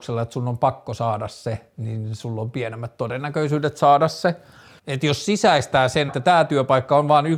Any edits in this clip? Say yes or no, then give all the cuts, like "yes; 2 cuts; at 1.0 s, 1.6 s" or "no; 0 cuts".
yes; 2 cuts; at 4.8 s, 6.1 s